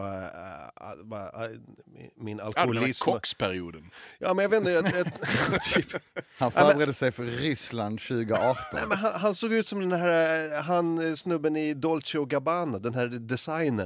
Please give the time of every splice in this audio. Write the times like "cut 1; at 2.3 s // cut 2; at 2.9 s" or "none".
none